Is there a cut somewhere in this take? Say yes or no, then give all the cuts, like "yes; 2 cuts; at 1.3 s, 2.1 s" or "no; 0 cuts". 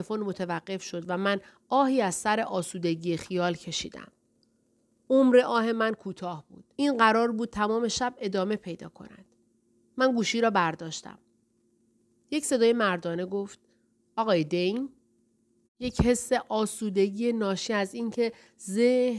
yes; 2 cuts; at 6.7 s, 15.6 s